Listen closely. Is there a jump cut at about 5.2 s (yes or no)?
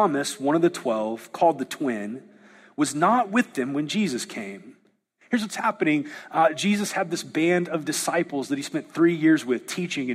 yes